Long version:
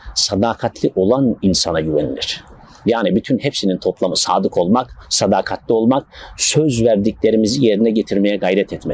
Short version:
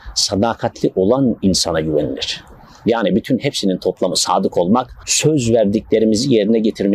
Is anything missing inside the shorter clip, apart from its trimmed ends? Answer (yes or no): yes